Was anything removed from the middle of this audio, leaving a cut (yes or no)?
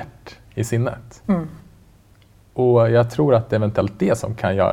no